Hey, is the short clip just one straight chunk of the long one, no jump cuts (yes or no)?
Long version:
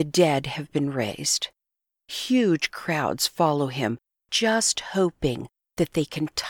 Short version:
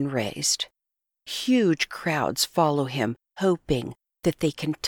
no